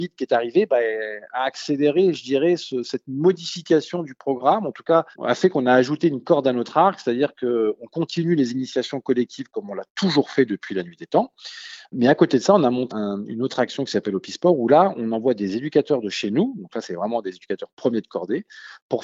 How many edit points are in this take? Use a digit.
2